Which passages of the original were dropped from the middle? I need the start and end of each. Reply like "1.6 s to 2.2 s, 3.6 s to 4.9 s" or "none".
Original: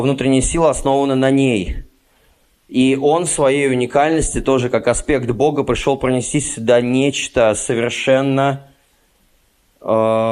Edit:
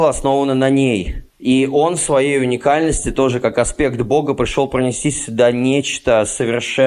1.9 s to 2.6 s